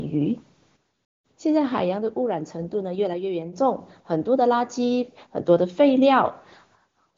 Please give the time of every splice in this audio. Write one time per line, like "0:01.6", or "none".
none